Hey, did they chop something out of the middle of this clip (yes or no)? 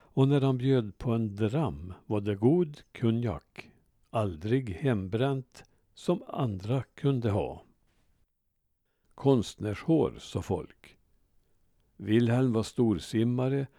yes